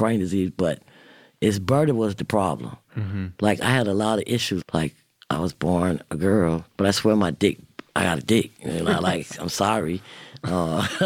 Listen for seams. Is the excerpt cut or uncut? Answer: cut